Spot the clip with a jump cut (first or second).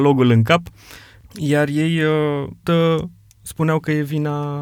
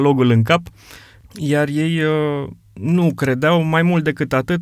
first